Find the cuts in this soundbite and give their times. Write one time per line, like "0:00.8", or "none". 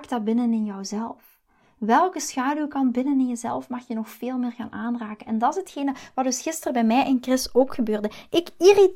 none